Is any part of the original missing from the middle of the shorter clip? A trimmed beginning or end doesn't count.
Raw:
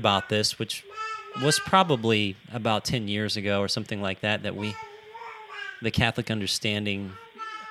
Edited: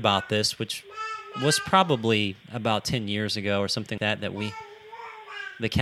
yes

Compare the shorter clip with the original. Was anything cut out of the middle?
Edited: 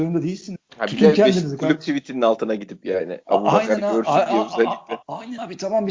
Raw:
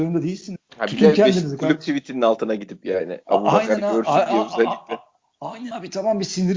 yes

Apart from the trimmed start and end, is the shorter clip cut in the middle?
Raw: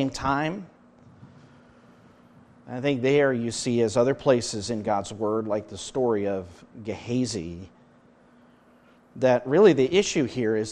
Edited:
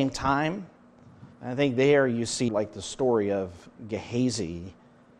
yes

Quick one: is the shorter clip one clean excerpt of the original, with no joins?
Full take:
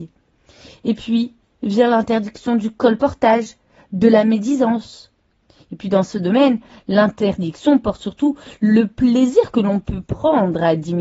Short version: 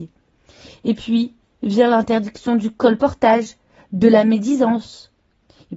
yes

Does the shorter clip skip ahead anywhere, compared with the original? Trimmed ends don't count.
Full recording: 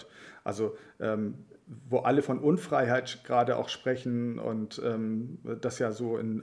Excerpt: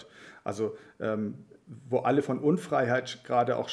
no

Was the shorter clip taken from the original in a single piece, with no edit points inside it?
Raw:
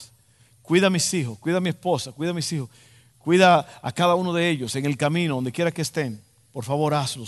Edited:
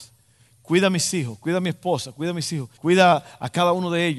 no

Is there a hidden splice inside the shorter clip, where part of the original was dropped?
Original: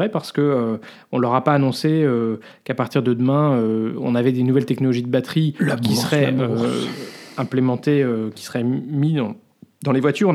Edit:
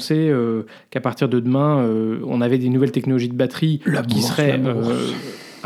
no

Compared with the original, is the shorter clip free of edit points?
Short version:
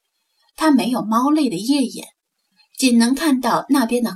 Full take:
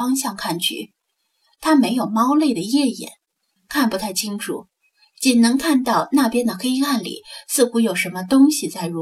no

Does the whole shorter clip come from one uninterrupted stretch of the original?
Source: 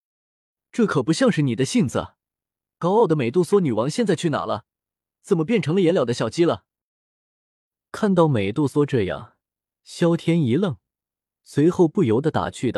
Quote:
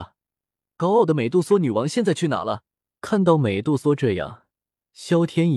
no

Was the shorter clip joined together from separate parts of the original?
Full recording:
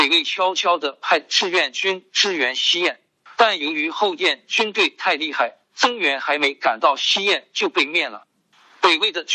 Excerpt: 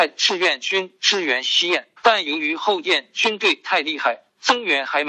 yes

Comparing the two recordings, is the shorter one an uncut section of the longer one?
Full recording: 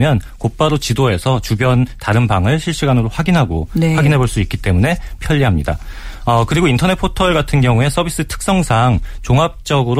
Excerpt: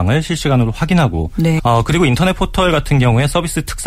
no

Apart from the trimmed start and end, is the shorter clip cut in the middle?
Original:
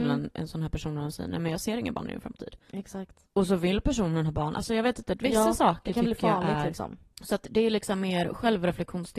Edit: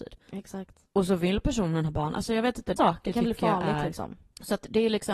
yes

